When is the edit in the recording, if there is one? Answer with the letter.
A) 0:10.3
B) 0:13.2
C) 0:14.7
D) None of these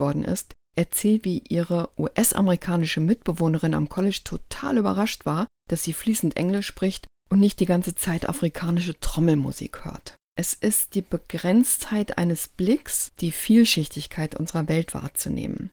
B